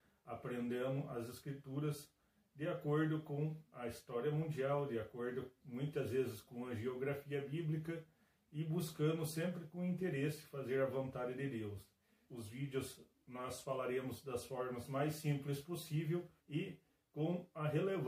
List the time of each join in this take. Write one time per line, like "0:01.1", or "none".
0:12.3
0:16.4